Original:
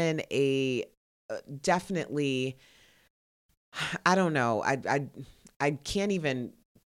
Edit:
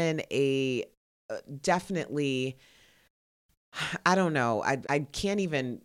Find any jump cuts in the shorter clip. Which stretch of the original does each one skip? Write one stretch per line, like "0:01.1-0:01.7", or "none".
0:04.8-0:05.6